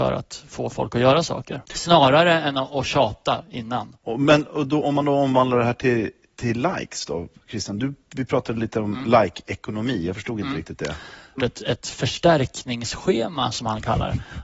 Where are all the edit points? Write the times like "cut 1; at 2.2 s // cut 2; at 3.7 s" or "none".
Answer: cut 1; at 1.7 s // cut 2; at 11.4 s